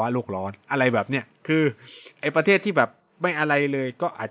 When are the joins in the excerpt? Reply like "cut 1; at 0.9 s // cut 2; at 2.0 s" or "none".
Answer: none